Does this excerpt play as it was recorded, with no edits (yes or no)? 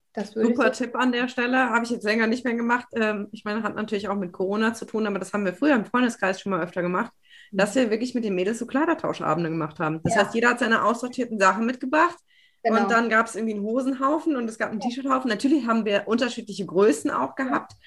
yes